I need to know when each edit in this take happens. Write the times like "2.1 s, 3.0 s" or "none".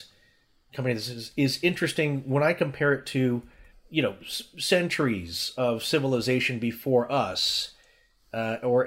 3.7 s, 5.6 s